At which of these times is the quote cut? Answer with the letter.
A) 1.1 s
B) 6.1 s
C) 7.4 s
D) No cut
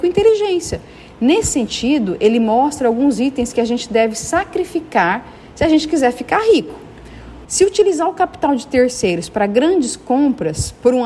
C